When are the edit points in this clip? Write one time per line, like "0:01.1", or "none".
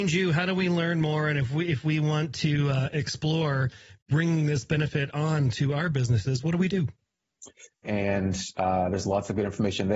0:07.8